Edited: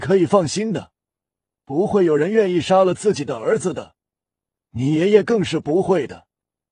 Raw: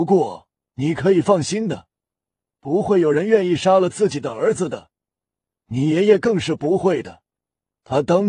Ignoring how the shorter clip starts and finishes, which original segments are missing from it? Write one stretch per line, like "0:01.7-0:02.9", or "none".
none